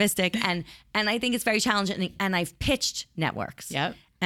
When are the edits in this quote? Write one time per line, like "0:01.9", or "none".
none